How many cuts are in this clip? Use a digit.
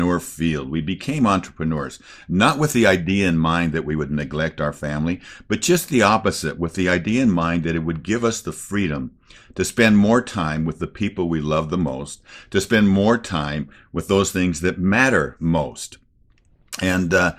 0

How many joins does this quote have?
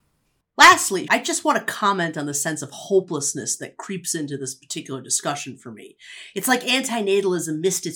1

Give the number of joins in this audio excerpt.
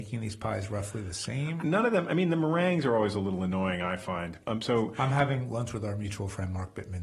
2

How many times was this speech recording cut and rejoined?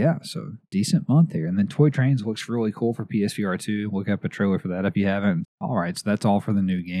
1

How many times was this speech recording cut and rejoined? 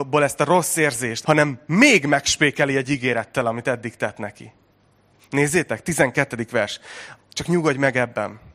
3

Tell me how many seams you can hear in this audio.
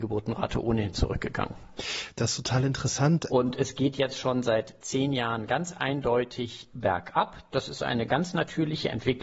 1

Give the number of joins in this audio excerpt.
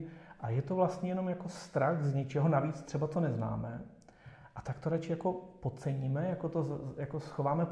0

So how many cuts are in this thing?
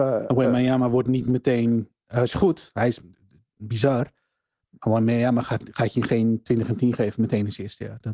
0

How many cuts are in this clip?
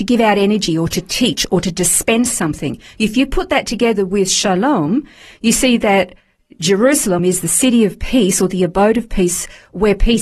1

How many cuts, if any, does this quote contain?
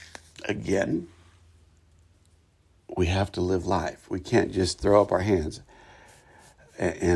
0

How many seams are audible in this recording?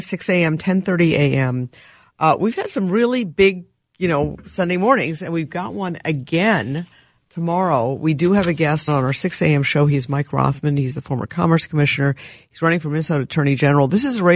1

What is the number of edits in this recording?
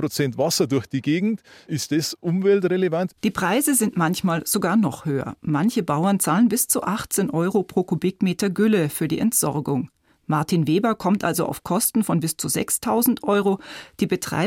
1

